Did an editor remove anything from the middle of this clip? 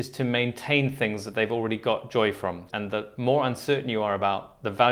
yes; 1 cut; at 2.7 s

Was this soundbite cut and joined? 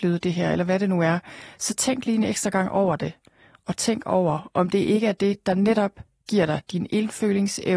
no; 0 cuts

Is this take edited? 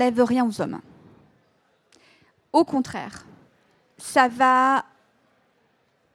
no; 0 cuts

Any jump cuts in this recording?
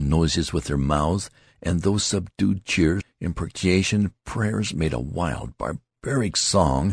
yes; 1 cut; at 3.0 s

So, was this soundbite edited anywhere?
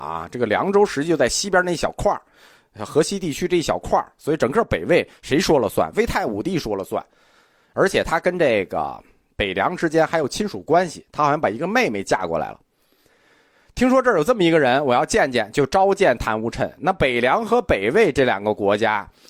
no; 0 cuts

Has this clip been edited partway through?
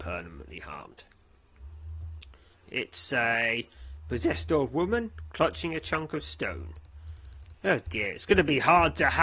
yes; 2 cuts; at 2.5 s, 7.5 s

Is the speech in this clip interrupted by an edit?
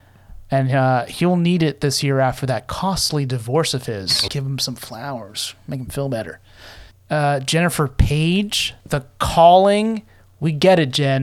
yes; 2 cuts; at 4.3 s, 6.9 s

